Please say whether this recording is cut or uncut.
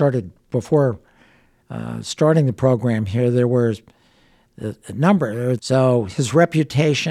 cut